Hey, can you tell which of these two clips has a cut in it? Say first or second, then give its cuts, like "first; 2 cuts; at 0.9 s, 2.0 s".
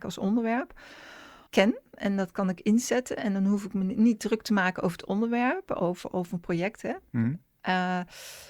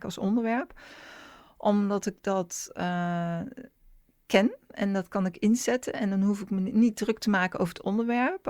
first; 1 cut; at 1.5 s